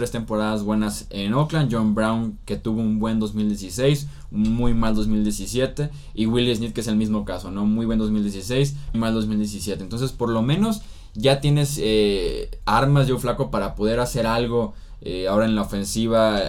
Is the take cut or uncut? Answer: cut